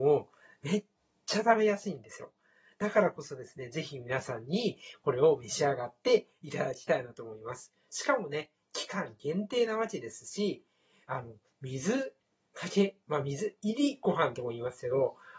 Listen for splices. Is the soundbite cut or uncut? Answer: uncut